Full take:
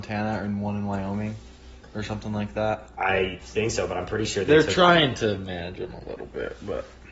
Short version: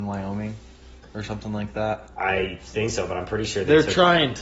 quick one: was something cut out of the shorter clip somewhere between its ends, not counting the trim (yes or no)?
no